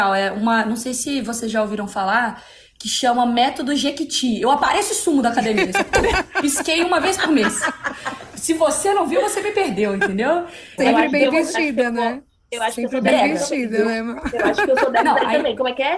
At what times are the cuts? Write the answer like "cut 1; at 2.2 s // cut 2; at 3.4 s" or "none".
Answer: cut 1; at 10.8 s